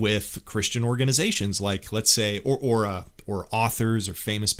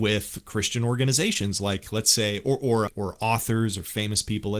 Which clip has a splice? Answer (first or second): second